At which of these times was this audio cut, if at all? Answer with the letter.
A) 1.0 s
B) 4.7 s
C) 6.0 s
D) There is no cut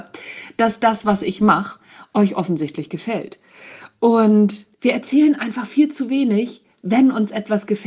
B